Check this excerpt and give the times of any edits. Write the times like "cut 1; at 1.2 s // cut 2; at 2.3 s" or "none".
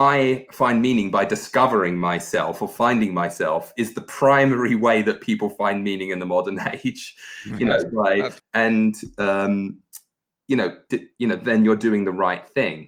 cut 1; at 8.4 s // cut 2; at 10.9 s